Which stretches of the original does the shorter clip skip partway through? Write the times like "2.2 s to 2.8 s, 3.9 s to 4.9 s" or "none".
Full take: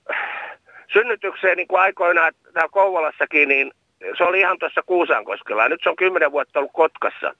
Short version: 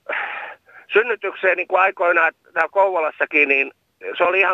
none